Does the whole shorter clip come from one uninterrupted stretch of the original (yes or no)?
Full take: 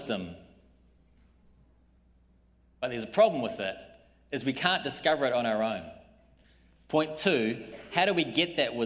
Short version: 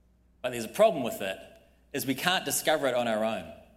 yes